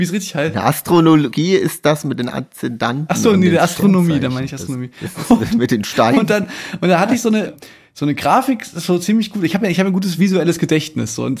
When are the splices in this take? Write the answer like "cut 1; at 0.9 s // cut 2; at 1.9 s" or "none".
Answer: none